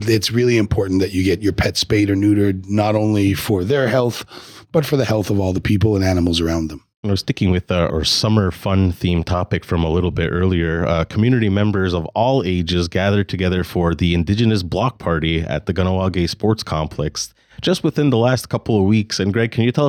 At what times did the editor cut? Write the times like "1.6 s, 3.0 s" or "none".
7.9 s